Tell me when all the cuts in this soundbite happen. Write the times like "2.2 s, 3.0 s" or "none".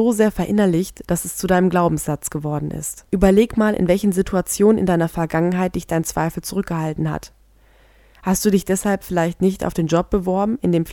3.1 s